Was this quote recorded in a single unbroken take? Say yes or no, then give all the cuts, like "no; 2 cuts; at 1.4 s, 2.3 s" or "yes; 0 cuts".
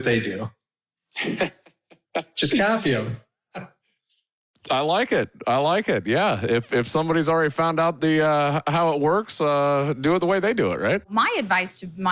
yes; 0 cuts